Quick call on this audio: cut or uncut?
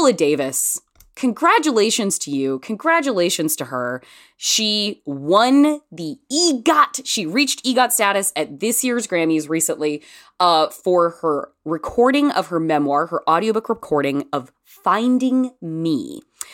uncut